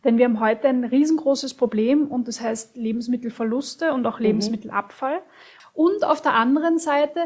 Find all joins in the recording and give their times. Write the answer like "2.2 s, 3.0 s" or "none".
5.6 s